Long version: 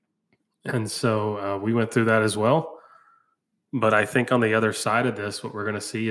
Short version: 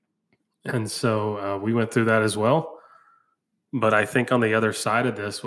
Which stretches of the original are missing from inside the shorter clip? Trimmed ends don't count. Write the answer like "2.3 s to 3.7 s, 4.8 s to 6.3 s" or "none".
none